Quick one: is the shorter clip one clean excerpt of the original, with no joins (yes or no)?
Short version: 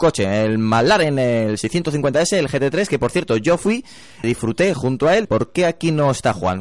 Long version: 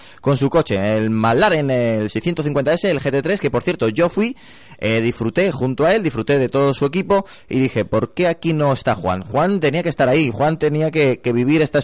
no